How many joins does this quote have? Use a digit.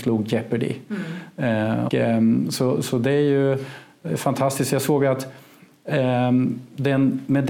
1